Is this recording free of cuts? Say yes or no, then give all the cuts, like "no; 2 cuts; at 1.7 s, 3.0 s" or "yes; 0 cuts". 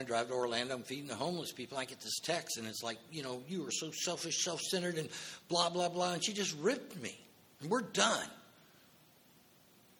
yes; 0 cuts